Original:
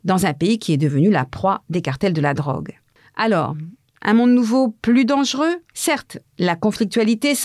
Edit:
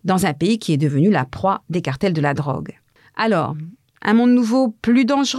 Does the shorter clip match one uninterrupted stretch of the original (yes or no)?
yes